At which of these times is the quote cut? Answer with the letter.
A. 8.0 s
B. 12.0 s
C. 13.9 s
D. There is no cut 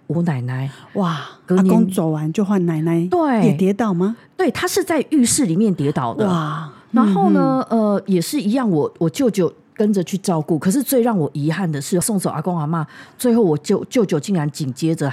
B